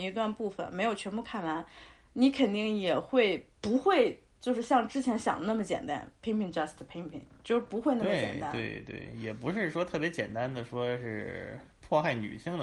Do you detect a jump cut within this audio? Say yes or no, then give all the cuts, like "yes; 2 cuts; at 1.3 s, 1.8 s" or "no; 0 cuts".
no; 0 cuts